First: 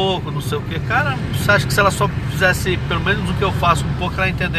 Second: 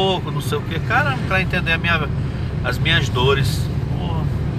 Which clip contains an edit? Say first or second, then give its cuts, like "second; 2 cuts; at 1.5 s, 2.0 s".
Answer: second; 1 cut; at 1.3 s